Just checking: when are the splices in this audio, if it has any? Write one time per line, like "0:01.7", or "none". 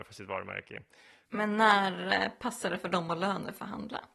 0:01.2